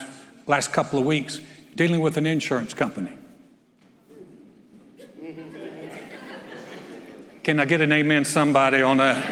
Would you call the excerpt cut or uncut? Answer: uncut